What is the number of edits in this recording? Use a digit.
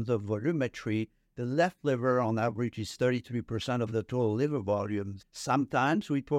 1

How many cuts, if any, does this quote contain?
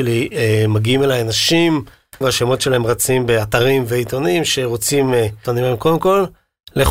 2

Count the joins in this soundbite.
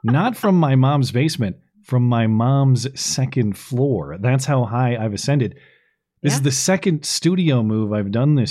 0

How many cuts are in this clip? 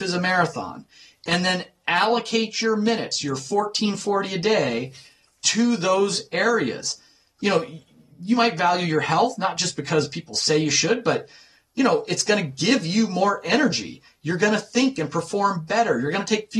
0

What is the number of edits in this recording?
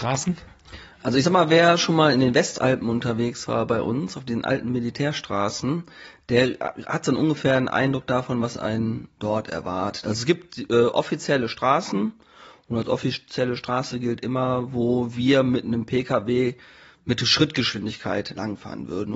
0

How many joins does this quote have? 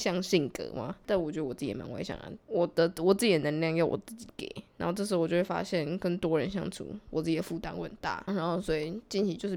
1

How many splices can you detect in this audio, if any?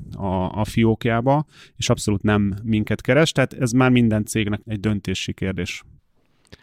1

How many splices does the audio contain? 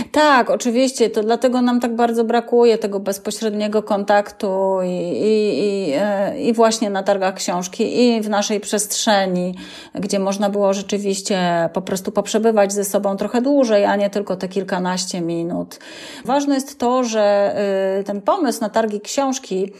1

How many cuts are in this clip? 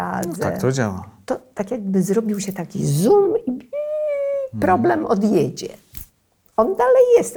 0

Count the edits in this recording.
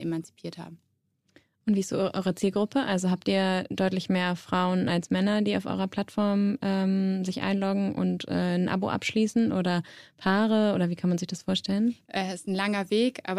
1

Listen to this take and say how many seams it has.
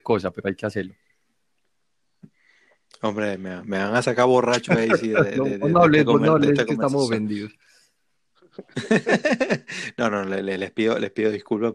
0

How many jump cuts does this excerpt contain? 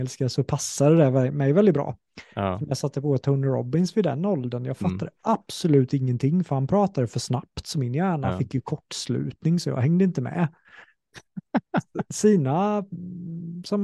1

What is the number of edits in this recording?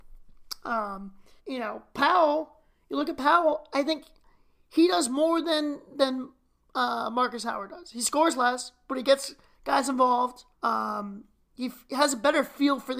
2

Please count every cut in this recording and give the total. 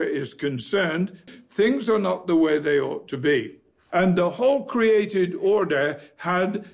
2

